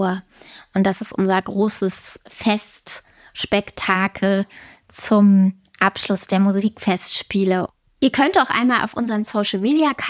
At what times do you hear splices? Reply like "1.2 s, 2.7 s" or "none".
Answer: none